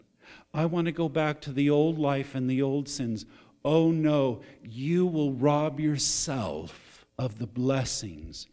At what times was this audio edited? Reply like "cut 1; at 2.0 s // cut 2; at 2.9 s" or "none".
cut 1; at 7.1 s

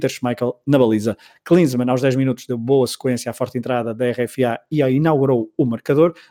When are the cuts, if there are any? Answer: none

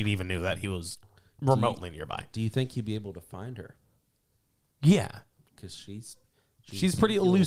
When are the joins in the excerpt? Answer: none

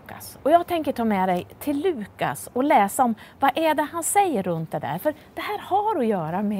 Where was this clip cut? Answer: none

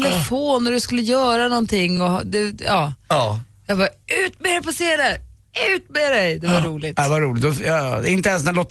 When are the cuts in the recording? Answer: none

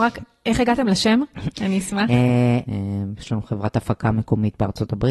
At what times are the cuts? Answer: cut 1; at 1.5 s // cut 2; at 2.7 s

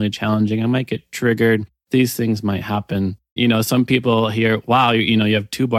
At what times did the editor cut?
cut 1; at 3.4 s

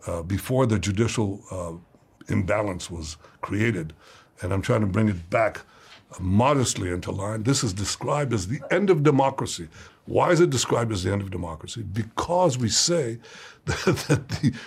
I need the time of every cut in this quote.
cut 1; at 2.2 s // cut 2; at 9.9 s

